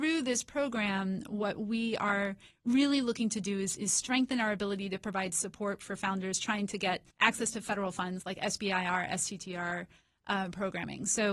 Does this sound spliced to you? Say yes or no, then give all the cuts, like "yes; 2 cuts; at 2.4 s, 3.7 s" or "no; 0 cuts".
yes; 1 cut; at 7.1 s